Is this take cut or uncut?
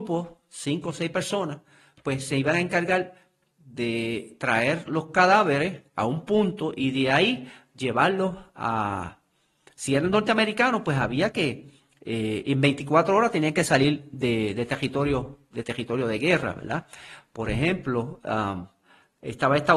uncut